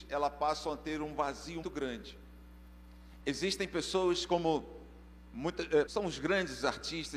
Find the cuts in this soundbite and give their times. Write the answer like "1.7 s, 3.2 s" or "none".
1.6 s, 3.2 s, 5.9 s